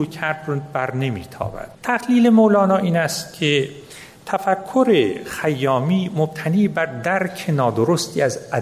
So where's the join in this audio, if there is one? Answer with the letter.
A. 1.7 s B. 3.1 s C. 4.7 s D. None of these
A